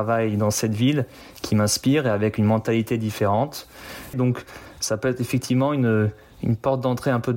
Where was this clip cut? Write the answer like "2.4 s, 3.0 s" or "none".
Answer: 4.1 s

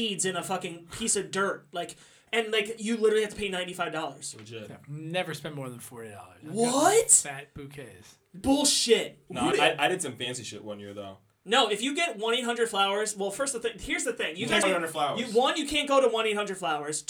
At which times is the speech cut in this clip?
9.5 s, 14.6 s

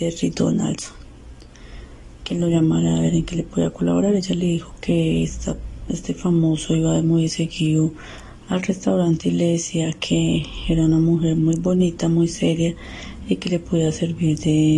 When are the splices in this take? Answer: none

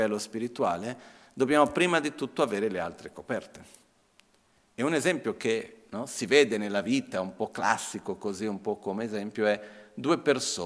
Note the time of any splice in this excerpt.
none

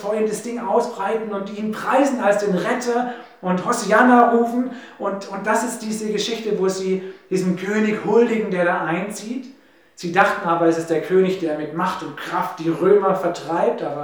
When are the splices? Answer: none

